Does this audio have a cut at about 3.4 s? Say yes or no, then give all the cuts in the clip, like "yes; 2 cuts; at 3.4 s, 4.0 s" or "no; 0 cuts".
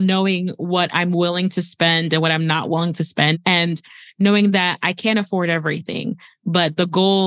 no; 0 cuts